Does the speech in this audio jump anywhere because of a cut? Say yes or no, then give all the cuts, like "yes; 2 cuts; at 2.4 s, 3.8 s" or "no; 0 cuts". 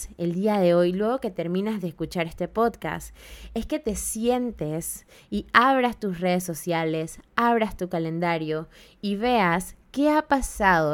no; 0 cuts